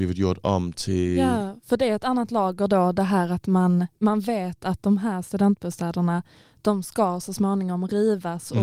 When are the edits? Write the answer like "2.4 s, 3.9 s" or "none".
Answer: none

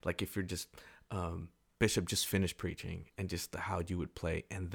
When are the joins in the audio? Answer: 1.6 s

